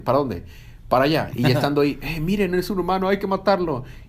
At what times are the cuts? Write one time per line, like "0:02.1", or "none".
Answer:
0:01.3